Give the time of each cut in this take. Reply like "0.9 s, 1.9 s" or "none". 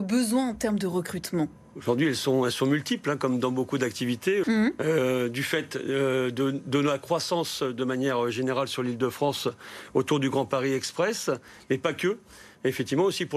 4.4 s